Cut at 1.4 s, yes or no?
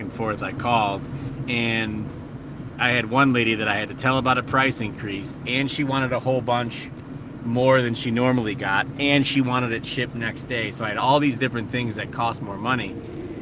yes